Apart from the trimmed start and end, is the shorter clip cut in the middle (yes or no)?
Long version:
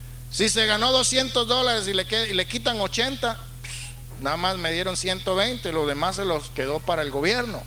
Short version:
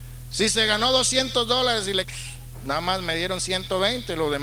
yes